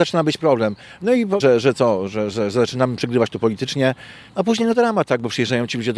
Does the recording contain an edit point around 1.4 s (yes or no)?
yes